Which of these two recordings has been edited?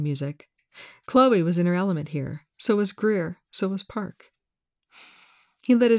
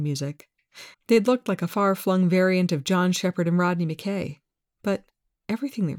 second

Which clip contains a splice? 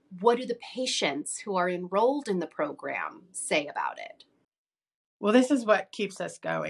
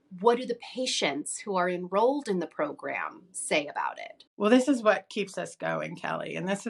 second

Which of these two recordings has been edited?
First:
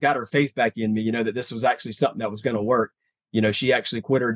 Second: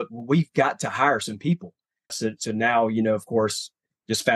second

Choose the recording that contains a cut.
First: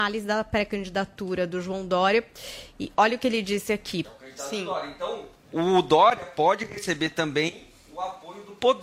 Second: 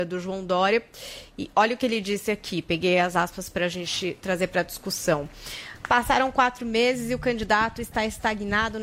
first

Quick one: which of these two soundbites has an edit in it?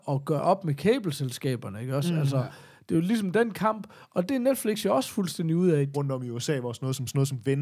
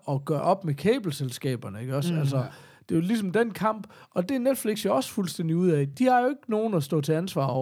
first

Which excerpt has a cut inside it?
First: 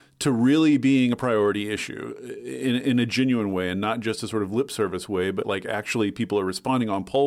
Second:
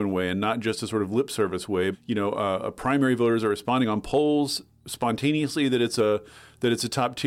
second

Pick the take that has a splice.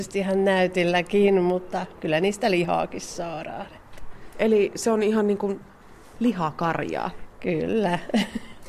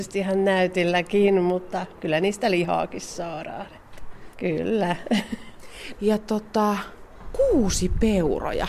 second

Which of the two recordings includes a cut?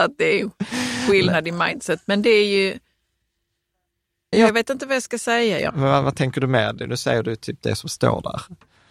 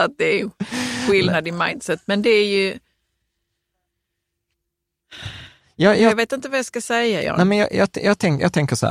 first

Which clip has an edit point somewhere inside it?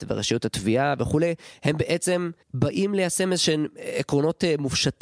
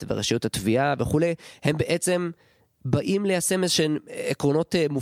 first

